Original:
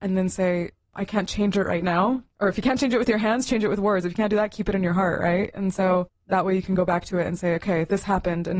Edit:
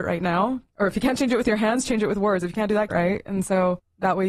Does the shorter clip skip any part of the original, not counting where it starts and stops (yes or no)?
yes